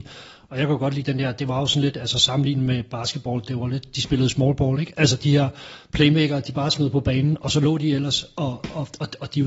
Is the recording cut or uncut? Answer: uncut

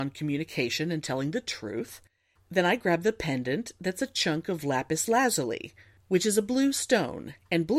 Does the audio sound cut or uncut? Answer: uncut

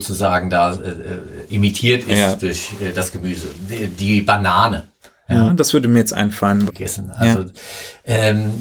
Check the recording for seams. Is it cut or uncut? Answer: cut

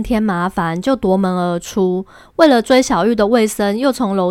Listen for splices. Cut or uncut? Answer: uncut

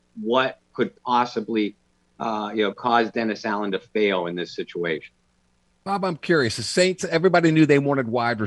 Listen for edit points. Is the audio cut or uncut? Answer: uncut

